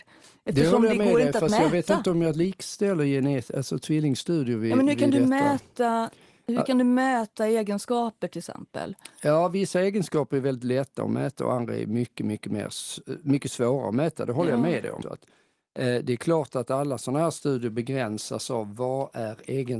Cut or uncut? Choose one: cut